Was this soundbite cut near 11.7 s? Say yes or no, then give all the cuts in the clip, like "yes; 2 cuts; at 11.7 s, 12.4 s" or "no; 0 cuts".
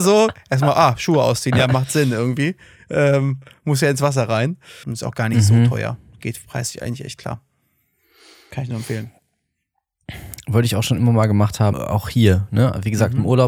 yes; 2 cuts; at 4.8 s, 11.7 s